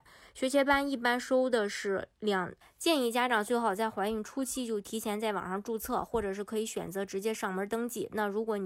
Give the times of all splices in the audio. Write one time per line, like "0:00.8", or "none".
0:02.6